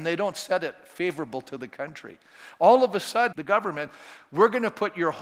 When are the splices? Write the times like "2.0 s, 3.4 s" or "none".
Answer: 3.3 s